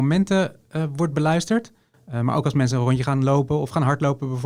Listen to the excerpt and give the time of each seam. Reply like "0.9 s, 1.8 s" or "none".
1.9 s